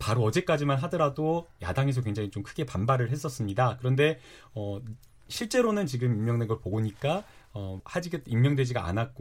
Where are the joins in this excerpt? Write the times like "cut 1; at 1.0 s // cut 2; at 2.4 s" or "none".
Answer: cut 1; at 7.8 s